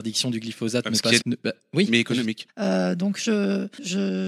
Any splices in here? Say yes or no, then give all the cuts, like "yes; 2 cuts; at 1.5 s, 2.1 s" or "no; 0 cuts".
yes; 2 cuts; at 1.2 s, 2.5 s